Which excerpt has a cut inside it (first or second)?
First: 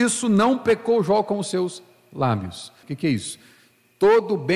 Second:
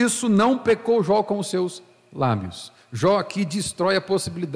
first